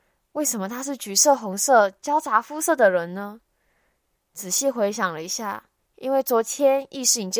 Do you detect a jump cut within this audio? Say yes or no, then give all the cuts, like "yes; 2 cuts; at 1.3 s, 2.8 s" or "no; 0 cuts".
yes; 1 cut; at 5.8 s